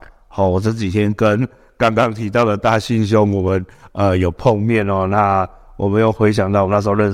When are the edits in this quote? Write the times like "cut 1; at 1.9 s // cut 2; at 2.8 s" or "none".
none